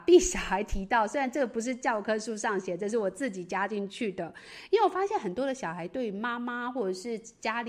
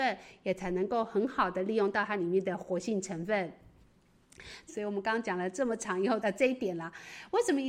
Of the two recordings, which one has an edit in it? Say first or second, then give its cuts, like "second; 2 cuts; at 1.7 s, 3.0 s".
second; 2 cuts; at 4.7 s, 6.2 s